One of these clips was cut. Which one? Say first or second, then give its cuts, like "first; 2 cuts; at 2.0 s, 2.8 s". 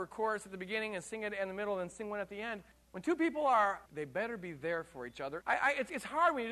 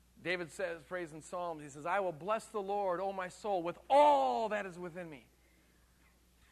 first; 3 cuts; at 2.7 s, 3.9 s, 5.4 s